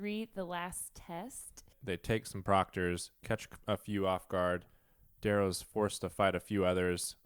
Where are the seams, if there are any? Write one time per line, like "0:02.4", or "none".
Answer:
0:01.7